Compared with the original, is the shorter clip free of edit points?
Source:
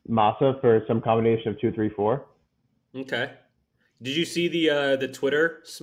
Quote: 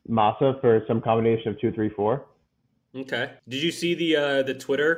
no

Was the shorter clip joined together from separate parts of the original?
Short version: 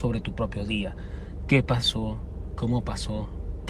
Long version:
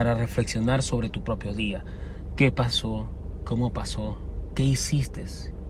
no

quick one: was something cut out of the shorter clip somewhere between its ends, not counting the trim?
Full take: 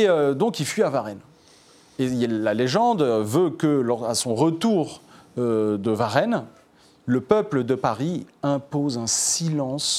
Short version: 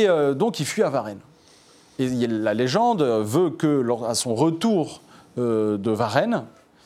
no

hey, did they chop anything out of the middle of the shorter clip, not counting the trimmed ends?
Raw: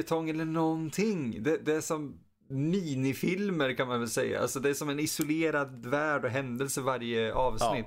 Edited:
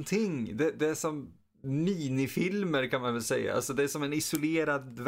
no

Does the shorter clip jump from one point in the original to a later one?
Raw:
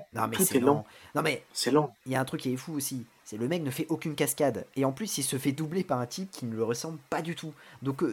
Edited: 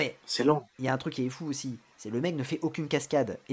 no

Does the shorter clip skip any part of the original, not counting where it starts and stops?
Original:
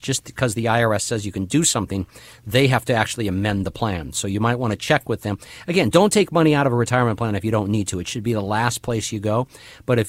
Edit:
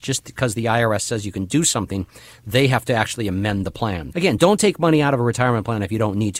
yes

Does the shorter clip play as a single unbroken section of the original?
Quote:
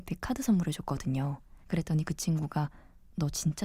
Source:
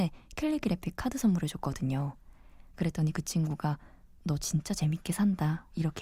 no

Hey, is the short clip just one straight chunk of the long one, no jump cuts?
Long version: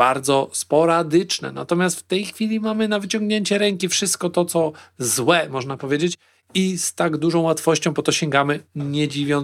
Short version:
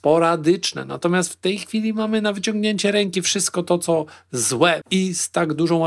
no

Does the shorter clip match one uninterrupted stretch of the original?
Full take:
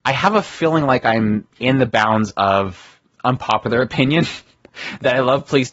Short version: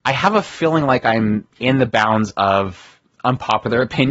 yes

